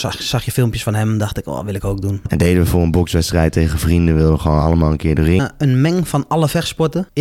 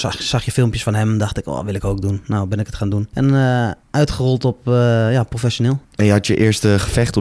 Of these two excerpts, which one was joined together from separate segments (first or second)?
first